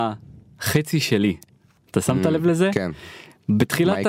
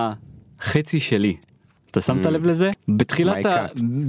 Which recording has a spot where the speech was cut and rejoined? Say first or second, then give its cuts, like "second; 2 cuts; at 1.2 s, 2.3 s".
second; 1 cut; at 2.7 s